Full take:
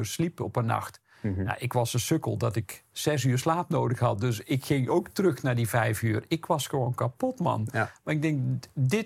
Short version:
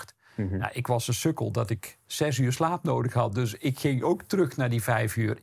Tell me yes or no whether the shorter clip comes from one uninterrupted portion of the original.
yes